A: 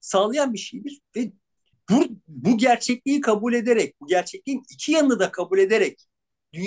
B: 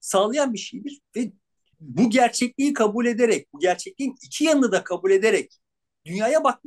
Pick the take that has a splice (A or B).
B